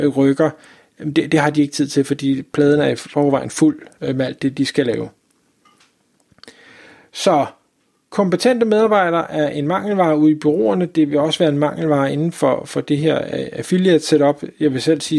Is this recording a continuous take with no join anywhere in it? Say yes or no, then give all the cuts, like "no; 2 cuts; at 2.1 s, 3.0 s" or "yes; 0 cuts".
yes; 0 cuts